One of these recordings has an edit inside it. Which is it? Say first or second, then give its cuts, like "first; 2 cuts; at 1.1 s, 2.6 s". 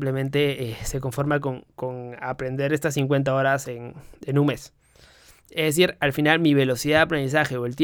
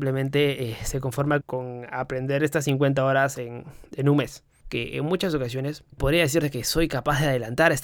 second; 3 cuts; at 1.4 s, 4.6 s, 5.9 s